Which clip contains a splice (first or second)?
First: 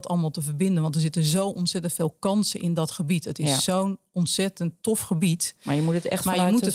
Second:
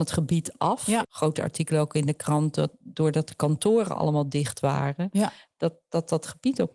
second